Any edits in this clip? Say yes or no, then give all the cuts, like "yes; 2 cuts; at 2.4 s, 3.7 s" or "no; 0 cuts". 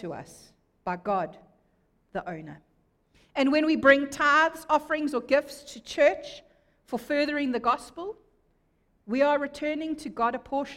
no; 0 cuts